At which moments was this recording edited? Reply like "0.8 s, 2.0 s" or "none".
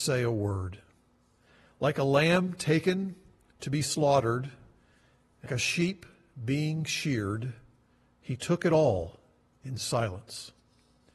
5.5 s

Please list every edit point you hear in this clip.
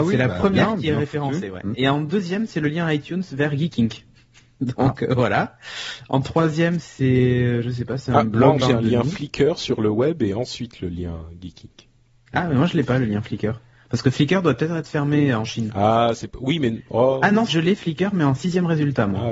8.6 s, 17.5 s

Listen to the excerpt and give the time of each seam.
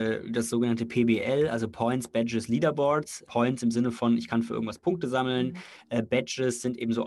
3.2 s

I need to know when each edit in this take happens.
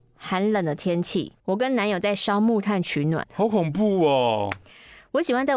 1.4 s, 3.2 s

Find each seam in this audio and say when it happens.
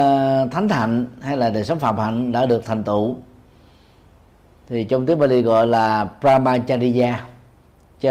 none

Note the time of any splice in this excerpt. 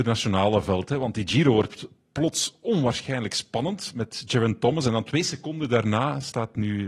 none

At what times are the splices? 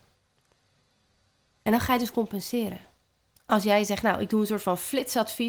3.4 s

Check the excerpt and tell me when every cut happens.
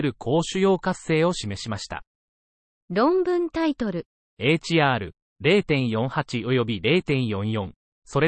2.7 s, 4.2 s

